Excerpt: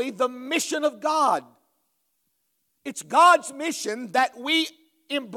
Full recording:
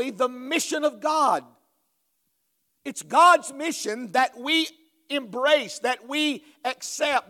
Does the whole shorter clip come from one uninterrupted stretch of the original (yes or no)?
yes